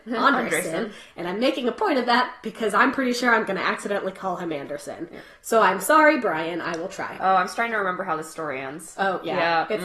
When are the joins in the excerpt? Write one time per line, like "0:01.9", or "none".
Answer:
none